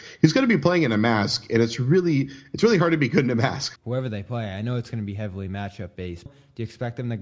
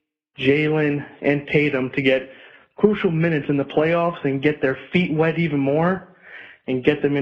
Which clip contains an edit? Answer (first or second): first